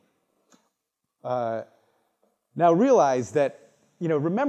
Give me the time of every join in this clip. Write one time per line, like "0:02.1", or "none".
none